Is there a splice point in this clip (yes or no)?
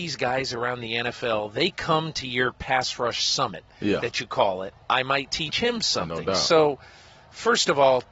yes